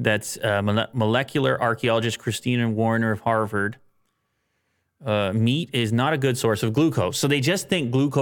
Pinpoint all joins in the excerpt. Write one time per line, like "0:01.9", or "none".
none